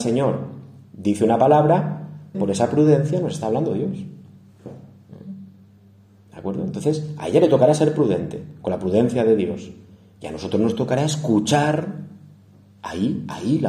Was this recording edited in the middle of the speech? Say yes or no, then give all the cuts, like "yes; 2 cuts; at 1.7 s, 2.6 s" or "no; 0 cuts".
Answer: yes; 1 cut; at 2.3 s